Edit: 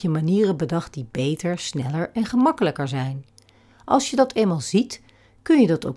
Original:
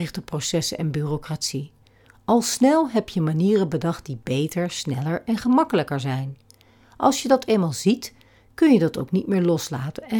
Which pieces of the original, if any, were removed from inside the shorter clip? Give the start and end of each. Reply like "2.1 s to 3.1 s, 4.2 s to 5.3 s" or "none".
none